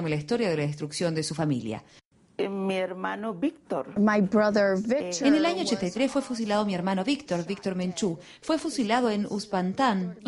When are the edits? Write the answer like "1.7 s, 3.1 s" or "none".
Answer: none